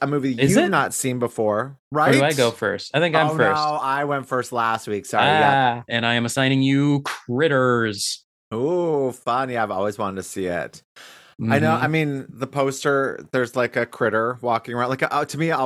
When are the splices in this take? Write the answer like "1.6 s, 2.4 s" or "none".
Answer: 5.9 s